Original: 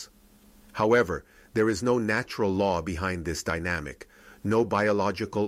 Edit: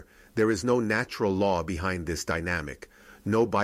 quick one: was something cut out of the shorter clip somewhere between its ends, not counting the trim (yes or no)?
no